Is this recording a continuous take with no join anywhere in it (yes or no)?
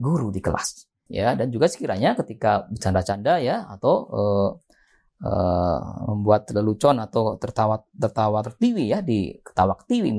no